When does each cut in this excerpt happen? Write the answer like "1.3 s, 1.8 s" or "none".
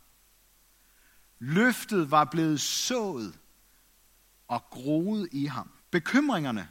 5.8 s